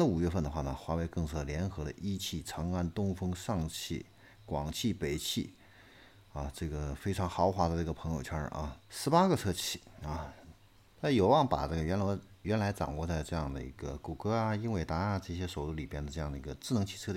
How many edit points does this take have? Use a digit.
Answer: 2